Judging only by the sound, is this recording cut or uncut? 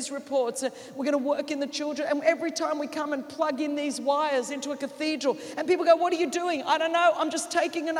uncut